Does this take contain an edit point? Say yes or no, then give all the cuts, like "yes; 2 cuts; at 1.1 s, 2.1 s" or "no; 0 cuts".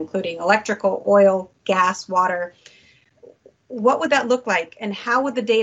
no; 0 cuts